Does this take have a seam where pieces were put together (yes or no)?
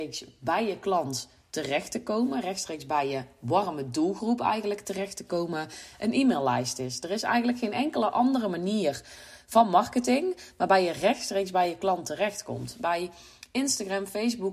no